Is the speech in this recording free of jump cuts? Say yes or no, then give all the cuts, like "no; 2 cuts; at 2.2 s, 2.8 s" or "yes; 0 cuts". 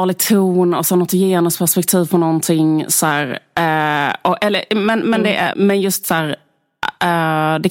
no; 1 cut; at 5.5 s